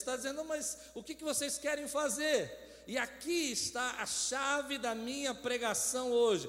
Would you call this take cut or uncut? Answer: uncut